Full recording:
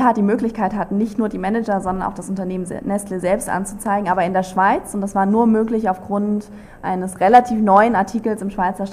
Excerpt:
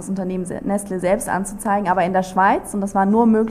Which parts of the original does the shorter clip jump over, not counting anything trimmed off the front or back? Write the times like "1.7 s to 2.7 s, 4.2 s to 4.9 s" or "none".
none